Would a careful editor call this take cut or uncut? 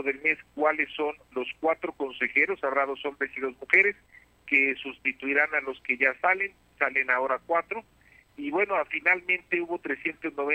uncut